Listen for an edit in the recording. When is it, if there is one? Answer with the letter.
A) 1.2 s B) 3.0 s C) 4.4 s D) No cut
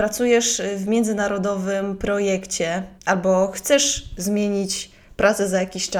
B